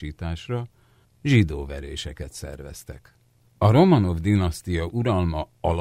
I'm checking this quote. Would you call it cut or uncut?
cut